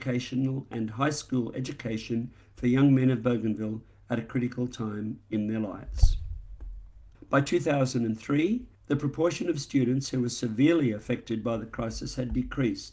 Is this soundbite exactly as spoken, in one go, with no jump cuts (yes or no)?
no